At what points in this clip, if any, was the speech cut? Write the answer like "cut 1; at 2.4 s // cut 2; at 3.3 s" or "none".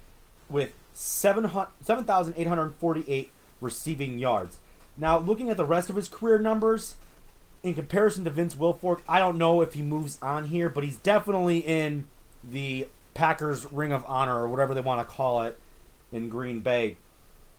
none